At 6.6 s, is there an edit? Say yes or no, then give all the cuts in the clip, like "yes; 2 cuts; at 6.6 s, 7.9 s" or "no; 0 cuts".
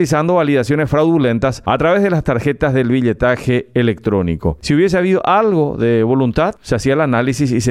no; 1 cut; at 4.6 s